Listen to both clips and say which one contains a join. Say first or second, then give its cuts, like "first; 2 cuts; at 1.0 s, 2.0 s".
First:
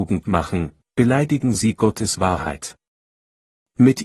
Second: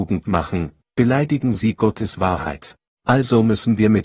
second; 1 cut; at 3.0 s